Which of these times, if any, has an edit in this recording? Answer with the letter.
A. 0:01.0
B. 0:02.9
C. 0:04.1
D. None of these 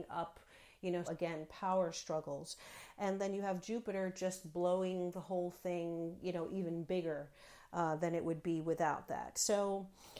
A